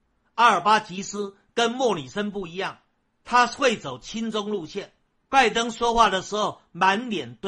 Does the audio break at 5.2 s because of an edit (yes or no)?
yes